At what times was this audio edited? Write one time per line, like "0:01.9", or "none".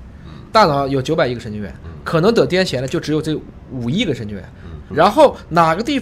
0:04.8